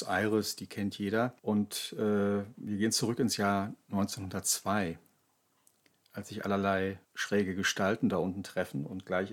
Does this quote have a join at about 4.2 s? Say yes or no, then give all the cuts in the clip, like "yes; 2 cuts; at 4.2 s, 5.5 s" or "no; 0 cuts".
no; 2 cuts; at 1.4 s, 7.0 s